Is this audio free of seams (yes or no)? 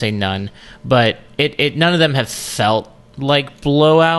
yes